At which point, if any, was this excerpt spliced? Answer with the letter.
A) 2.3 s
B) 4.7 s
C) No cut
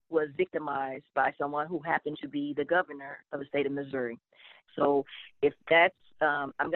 B